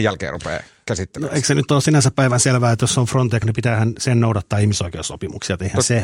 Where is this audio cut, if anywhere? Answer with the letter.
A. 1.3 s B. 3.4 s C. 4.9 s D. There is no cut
B